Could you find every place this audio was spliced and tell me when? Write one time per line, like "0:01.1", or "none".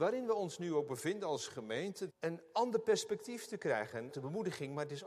0:02.1
0:04.1